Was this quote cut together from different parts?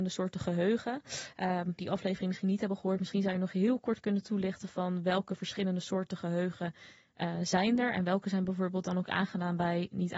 yes; 1 cut; at 1.8 s

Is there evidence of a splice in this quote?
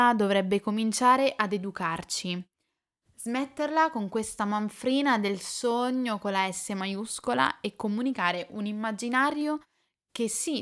no; 0 cuts

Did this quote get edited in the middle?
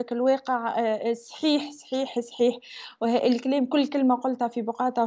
no; 0 cuts

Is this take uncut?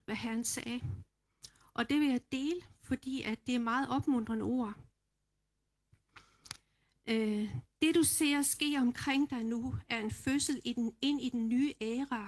yes; 0 cuts

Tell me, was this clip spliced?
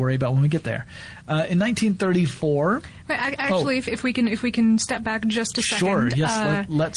no; 0 cuts

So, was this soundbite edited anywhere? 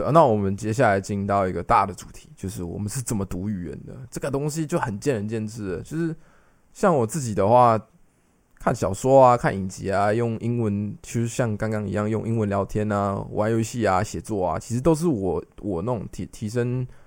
no; 0 cuts

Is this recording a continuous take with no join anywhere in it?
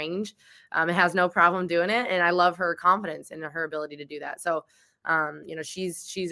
yes; 0 cuts

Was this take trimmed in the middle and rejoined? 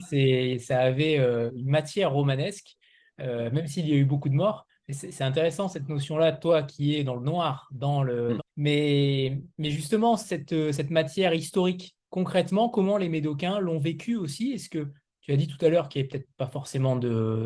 yes; 2 cuts; at 8.4 s, 9.5 s

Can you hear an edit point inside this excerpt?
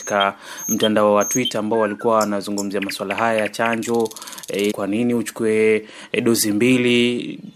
yes; 1 cut; at 4.7 s

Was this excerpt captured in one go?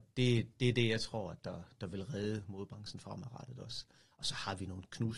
yes; 0 cuts

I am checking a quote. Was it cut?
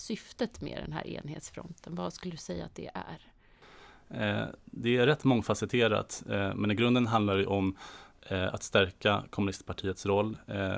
no; 0 cuts

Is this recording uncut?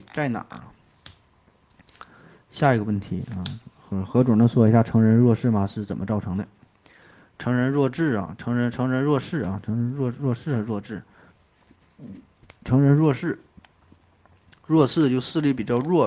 yes; 0 cuts

